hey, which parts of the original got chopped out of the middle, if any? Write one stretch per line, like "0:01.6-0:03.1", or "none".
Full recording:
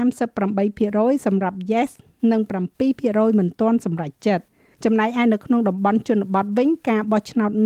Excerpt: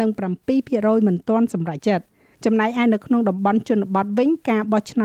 0:04.1-0:04.2